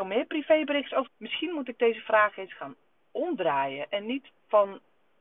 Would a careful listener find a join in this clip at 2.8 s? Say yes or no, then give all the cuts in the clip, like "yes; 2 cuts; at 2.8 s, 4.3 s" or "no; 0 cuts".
no; 1 cut; at 1.1 s